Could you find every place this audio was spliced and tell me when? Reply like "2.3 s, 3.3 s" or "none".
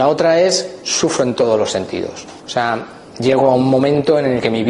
2.4 s